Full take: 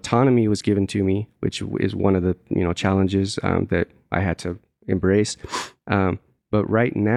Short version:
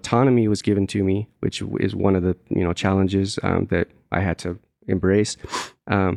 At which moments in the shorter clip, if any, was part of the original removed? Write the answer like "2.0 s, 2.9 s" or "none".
none